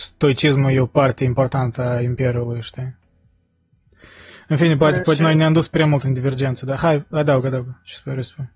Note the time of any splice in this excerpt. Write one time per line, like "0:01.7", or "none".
none